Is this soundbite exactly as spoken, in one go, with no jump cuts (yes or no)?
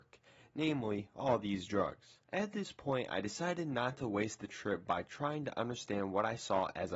no